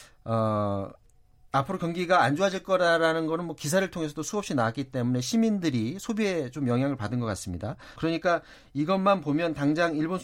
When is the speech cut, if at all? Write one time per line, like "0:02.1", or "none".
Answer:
0:08.0